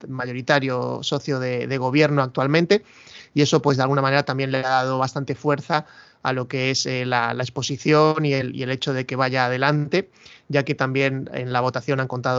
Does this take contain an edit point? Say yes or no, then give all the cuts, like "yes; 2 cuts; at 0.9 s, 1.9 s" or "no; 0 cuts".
no; 0 cuts